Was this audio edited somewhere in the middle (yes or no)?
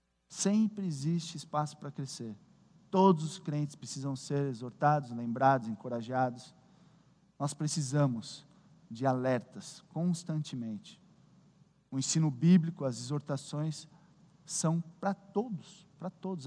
no